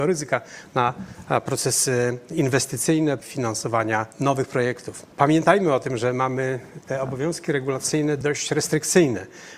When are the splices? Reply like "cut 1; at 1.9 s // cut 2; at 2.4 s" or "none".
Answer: cut 1; at 3.2 s